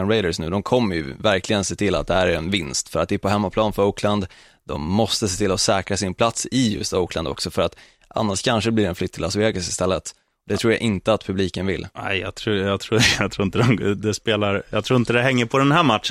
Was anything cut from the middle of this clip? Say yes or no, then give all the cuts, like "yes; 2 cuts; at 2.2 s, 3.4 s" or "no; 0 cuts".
no; 0 cuts